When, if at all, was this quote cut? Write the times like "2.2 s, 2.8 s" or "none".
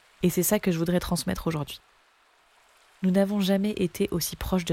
none